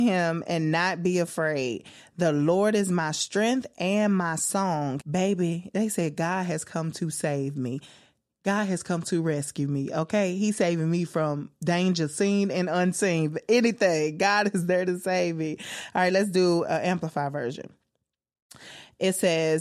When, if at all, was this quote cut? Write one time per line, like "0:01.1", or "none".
0:05.0